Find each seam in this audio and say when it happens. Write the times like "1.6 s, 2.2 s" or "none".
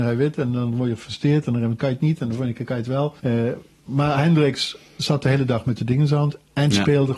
3.2 s